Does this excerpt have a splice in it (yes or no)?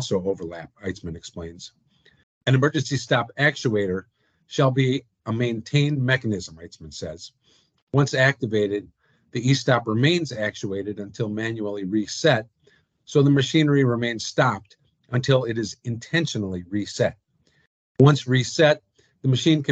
yes